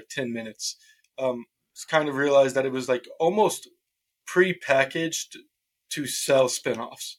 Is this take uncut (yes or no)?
yes